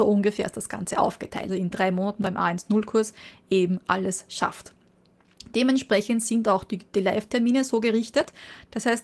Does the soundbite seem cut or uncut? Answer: cut